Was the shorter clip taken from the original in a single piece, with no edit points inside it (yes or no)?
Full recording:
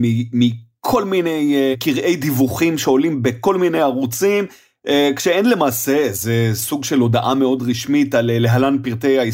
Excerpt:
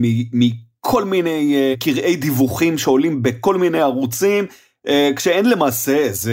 yes